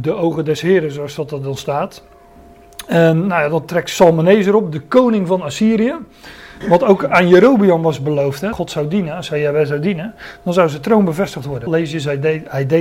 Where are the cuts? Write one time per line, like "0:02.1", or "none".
0:06.6
0:08.5
0:11.7